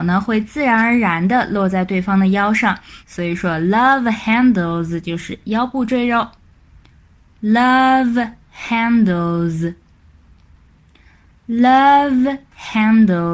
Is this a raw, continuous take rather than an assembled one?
no; 1 cut; at 3.0 s

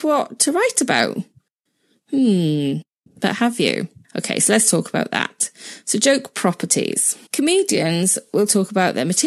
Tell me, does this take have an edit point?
yes; 1 cut; at 7.3 s

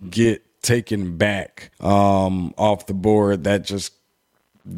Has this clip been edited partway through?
yes; 1 cut; at 1.7 s

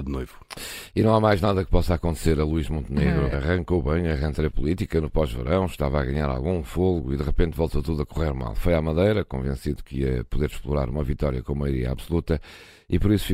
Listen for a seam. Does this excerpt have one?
yes; 1 cut; at 3.3 s

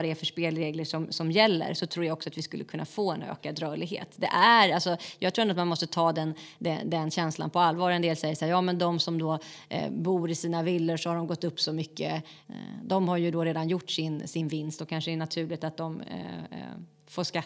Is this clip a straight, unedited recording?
yes; 0 cuts

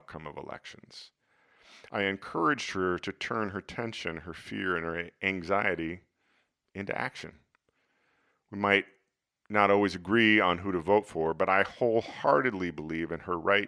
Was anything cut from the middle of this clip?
no; 0 cuts

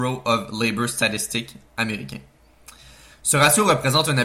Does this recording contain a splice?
no; 0 cuts

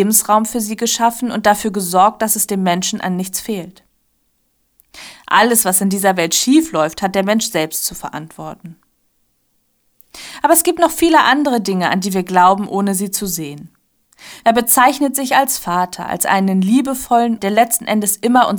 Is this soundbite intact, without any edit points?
no; 2 cuts; at 14.4 s, 17.4 s

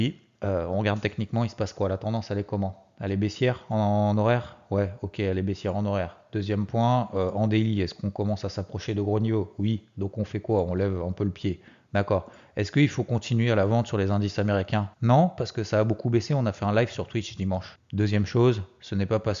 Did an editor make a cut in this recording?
yes; 2 cuts; at 14.9 s, 17.8 s

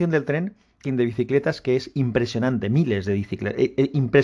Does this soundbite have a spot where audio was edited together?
no; 0 cuts

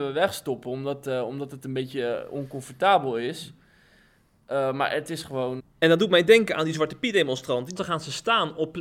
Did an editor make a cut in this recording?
yes; 2 cuts; at 5.6 s, 7.8 s

